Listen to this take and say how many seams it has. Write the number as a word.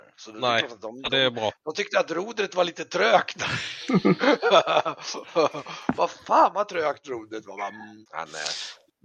one